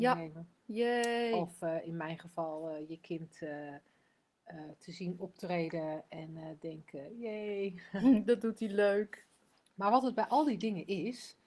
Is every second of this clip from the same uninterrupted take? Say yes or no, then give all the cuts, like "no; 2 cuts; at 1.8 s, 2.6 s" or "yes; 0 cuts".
yes; 0 cuts